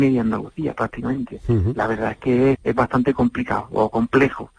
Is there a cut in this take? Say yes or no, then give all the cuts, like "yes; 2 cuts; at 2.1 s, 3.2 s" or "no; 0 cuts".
yes; 1 cut; at 2.5 s